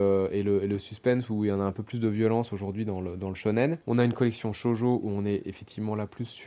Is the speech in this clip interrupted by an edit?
yes; 1 cut; at 3.8 s

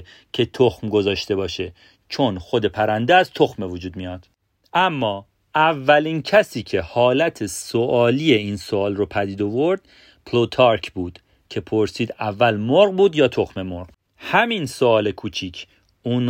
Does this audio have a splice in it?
no; 0 cuts

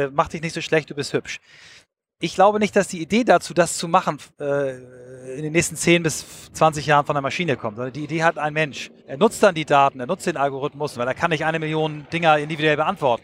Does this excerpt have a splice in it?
yes; 2 cuts; at 9.0 s, 10.9 s

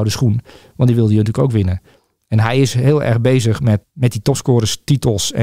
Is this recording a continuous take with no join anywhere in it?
no; 1 cut; at 3.8 s

